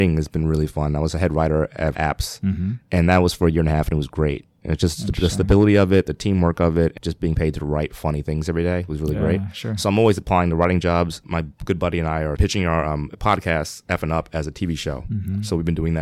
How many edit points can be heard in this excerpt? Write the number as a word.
one